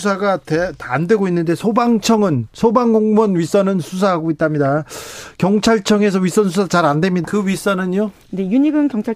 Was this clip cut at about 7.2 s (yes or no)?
yes